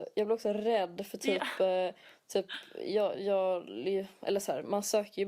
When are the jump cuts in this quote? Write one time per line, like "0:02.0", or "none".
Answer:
0:03.1